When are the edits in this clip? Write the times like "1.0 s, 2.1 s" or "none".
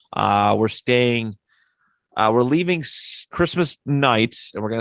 none